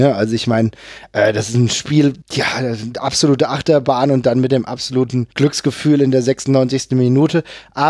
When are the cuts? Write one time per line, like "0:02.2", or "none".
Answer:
0:02.2
0:05.3